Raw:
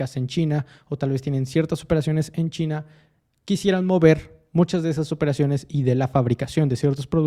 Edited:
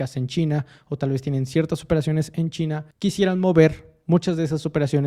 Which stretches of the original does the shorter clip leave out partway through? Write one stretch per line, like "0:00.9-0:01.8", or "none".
0:02.9-0:03.4